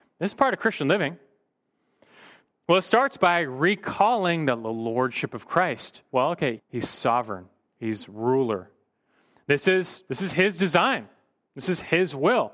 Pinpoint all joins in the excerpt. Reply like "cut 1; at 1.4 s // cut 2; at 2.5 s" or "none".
cut 1; at 6.6 s